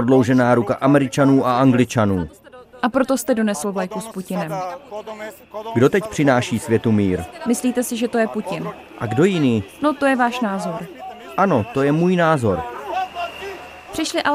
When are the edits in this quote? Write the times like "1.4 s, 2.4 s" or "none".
none